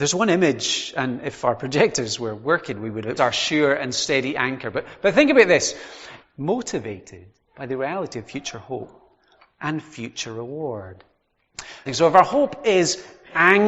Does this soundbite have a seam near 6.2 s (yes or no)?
yes